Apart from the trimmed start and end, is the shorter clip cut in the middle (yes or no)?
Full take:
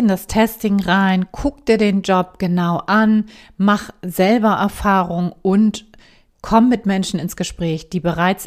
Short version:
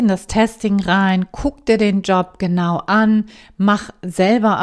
no